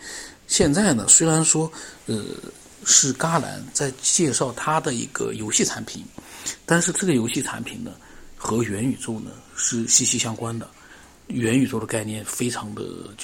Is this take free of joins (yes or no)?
yes